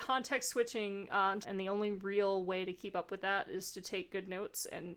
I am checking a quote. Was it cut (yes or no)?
yes